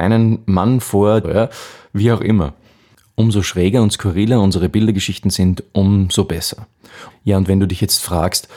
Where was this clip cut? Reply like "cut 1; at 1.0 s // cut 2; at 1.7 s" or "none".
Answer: cut 1; at 1.2 s // cut 2; at 7.1 s